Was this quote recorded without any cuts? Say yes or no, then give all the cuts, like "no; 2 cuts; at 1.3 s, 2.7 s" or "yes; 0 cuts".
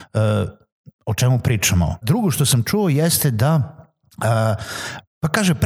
no; 1 cut; at 2.0 s